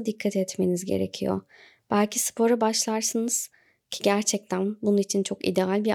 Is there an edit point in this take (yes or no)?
no